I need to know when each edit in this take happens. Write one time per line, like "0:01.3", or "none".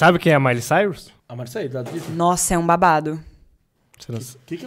0:01.2